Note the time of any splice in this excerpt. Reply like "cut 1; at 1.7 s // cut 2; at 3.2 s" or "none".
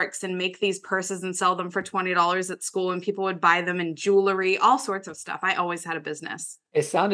none